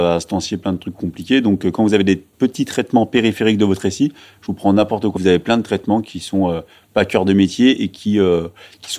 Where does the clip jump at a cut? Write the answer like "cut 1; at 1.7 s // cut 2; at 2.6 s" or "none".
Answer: cut 1; at 2.3 s // cut 2; at 5.2 s